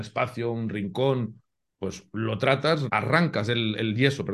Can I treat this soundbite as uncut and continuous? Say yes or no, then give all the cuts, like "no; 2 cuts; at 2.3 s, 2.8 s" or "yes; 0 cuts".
no; 1 cut; at 2.9 s